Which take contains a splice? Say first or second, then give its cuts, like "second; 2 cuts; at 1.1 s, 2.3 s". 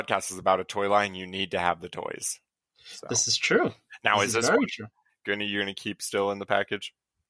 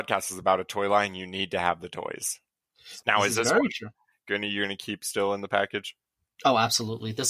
second; 1 cut; at 3.0 s